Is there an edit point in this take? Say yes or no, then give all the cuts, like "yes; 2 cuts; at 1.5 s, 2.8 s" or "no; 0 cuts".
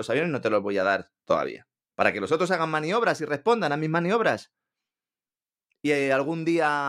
yes; 1 cut; at 1.9 s